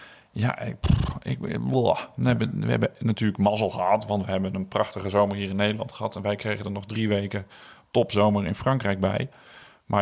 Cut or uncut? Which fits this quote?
uncut